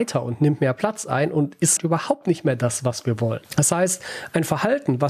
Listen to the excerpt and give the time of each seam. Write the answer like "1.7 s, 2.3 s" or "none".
1.8 s